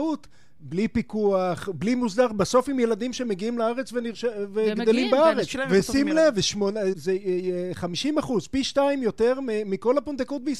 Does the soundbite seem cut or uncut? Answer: cut